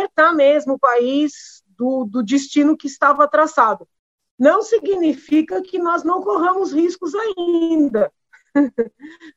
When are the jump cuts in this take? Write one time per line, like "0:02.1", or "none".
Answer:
none

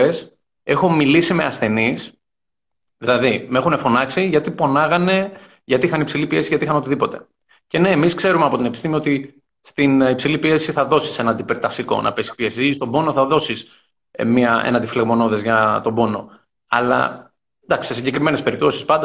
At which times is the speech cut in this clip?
none

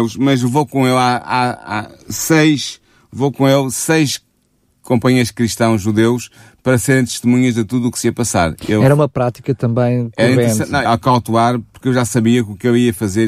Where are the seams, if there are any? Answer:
0:10.8

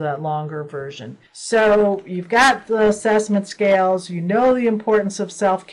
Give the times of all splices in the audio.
0:01.3

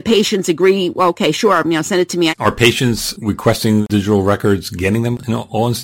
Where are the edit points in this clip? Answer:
0:02.3

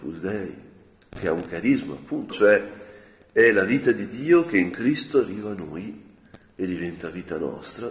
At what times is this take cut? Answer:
0:02.3

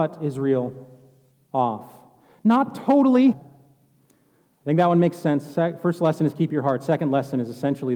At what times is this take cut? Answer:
0:03.3

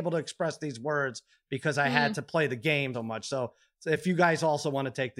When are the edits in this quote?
0:02.9

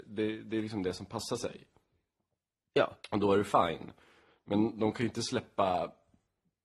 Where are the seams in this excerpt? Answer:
0:03.0

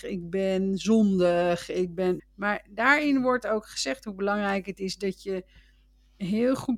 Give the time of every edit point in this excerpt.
0:02.2

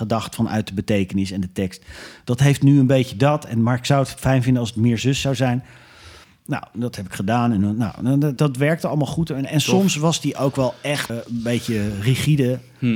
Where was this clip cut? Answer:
0:08.4
0:11.1

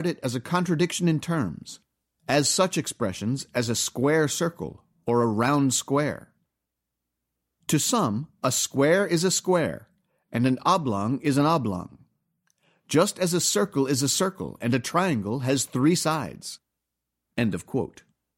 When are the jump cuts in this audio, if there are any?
0:17.2

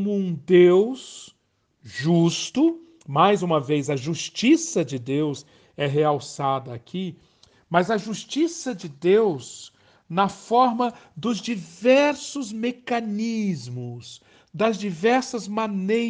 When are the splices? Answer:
none

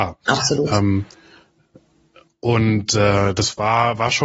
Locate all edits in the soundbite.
none

